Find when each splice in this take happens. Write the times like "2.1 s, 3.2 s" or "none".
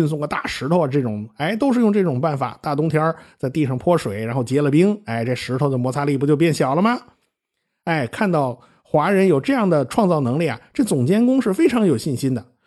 none